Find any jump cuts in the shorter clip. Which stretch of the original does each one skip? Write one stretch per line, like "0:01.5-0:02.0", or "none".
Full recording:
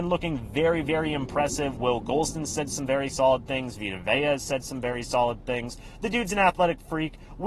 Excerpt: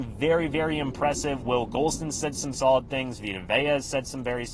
0:02.9-0:03.1